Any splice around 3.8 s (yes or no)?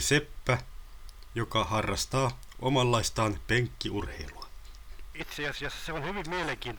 no